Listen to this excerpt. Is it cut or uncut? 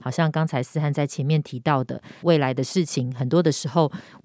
cut